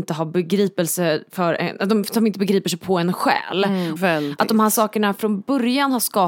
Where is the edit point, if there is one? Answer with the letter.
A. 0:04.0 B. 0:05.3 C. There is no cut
A